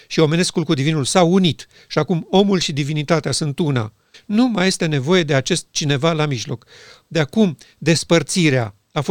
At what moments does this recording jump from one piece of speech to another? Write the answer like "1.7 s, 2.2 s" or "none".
4.1 s